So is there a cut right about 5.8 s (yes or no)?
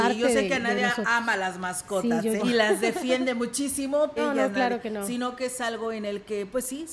no